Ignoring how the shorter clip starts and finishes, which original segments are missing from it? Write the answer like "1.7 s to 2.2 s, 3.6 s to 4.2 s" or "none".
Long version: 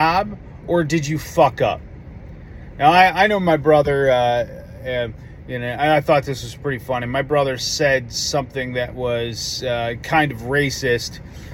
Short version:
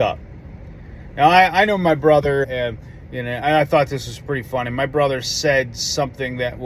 4.0 s to 4.8 s

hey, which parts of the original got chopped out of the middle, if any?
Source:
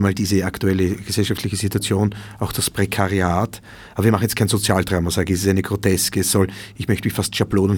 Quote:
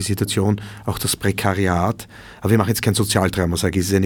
none

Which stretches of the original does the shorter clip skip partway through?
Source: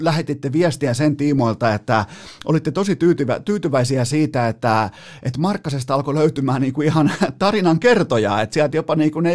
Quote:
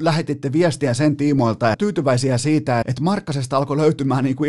1.7 s to 3.4 s, 4.5 s to 5.2 s

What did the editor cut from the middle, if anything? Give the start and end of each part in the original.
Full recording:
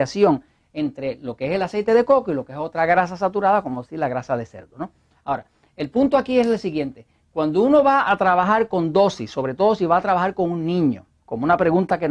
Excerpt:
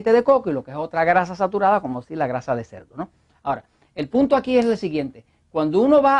none

